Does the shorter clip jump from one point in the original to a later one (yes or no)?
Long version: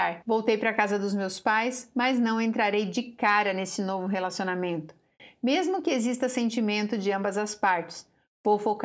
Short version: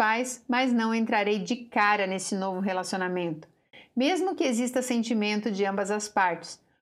no